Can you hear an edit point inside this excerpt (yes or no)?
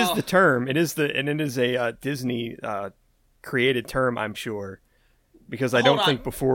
yes